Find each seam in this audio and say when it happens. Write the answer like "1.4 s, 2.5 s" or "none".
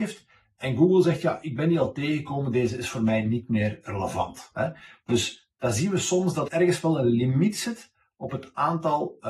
6.5 s